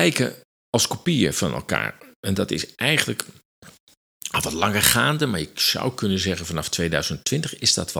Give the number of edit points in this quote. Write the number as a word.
zero